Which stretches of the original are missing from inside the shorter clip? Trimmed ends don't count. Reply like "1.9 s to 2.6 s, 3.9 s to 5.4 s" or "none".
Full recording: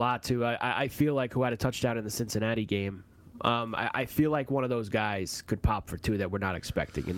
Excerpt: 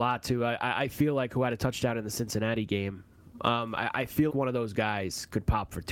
4.3 s to 4.5 s